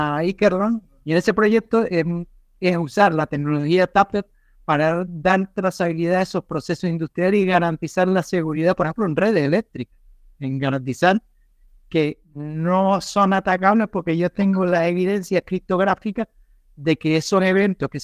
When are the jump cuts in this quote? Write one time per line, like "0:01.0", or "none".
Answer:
0:01.0